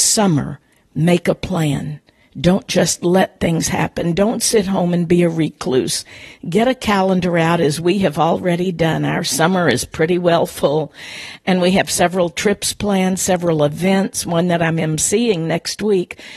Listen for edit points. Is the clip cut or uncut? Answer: uncut